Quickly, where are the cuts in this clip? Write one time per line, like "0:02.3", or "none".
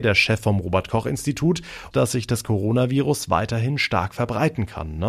0:01.9